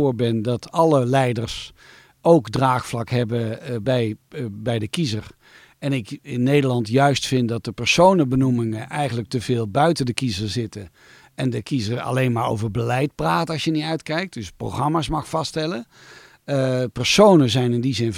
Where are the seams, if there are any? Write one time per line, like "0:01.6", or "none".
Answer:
none